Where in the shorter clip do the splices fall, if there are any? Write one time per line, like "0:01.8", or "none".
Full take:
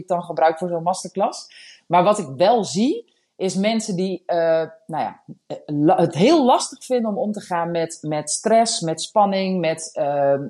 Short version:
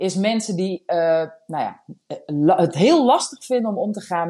none